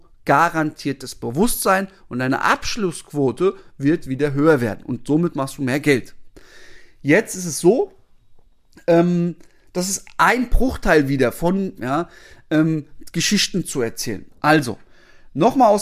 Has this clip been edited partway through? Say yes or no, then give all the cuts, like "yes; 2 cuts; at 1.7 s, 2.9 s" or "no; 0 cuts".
yes; 2 cuts; at 11.8 s, 14.3 s